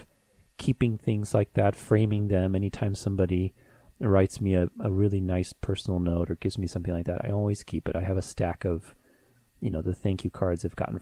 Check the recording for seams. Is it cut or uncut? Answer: uncut